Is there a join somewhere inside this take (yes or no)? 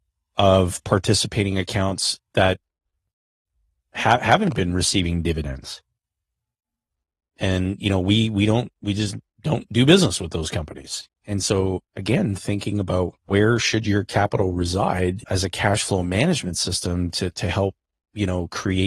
yes